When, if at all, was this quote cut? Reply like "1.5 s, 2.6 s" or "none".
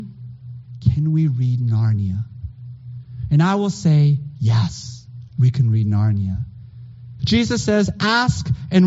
7.2 s